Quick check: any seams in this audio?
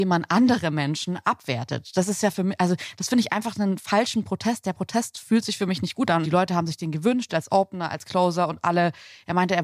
yes; 2 cuts; at 6.2 s, 7.3 s

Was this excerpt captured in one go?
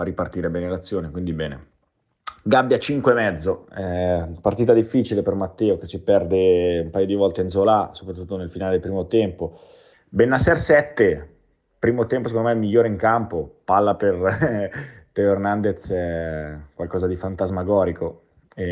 no; 1 cut; at 9.9 s

